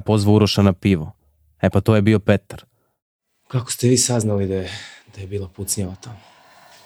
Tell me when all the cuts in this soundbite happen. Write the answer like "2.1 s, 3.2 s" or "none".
none